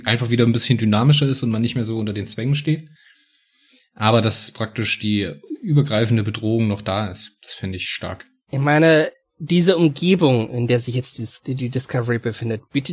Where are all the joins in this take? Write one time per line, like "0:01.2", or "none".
none